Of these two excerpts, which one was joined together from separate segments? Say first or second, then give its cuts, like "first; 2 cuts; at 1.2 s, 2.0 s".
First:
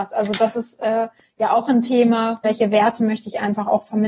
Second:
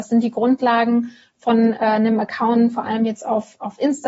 first; 1 cut; at 2.4 s